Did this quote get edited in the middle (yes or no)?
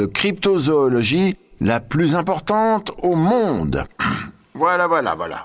no